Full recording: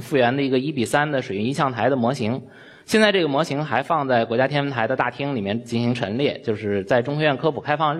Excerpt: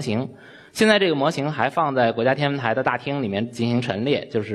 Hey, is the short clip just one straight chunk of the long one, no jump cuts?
yes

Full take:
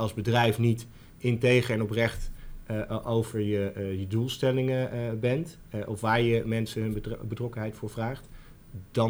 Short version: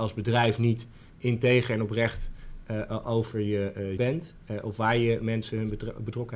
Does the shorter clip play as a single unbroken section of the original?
no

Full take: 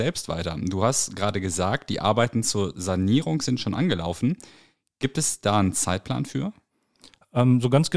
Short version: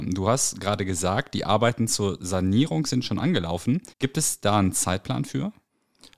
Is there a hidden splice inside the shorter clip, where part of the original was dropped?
yes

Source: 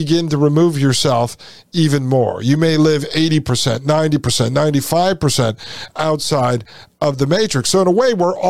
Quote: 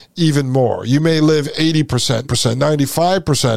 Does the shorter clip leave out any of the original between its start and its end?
yes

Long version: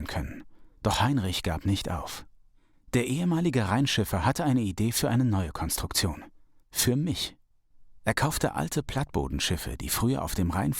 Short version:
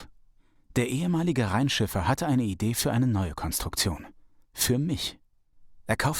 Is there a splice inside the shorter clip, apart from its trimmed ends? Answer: no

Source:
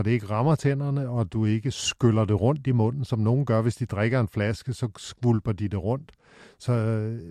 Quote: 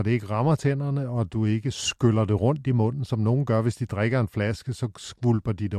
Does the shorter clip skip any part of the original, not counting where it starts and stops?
no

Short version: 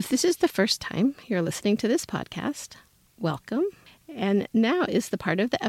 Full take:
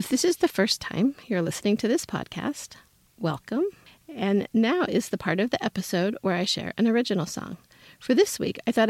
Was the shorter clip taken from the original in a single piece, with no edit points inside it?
yes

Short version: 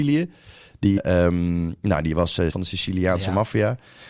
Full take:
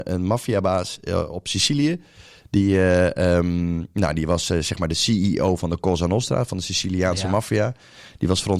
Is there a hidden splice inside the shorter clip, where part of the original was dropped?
yes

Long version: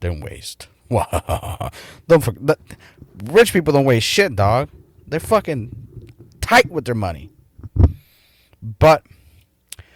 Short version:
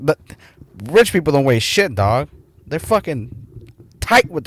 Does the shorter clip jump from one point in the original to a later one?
no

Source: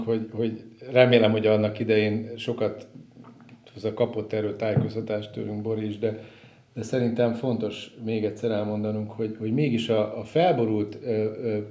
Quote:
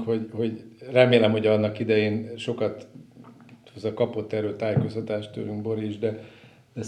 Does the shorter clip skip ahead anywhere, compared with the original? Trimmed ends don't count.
no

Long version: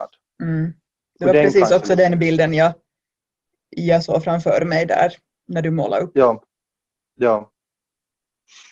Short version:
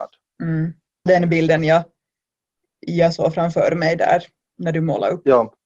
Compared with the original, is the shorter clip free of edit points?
no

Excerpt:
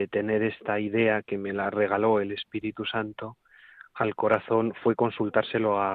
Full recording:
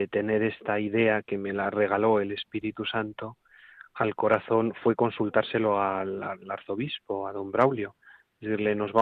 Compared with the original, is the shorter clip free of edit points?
yes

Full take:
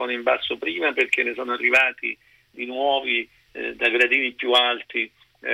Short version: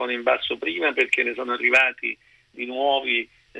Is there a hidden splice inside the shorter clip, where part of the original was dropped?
no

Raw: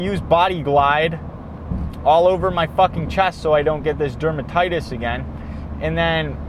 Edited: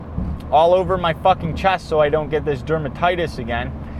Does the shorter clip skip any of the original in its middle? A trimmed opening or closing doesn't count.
no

